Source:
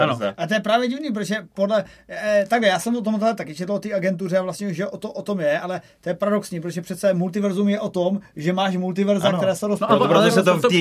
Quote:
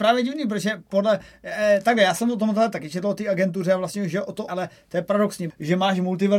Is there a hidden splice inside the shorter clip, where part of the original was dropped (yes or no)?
yes